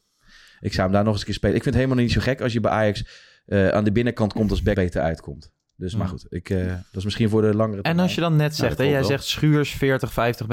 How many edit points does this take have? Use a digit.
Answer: 1